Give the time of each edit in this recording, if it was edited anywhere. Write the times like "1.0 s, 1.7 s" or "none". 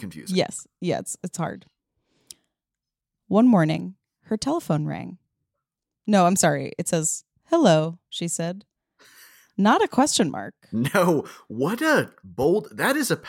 5.9 s